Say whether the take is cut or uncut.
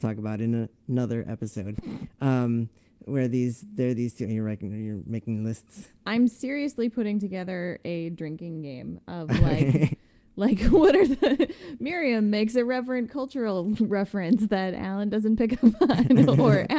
uncut